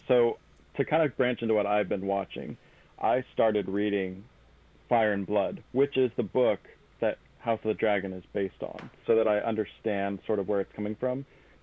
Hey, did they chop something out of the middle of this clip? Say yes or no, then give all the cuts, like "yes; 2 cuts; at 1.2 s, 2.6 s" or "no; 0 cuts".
yes; 1 cut; at 9.0 s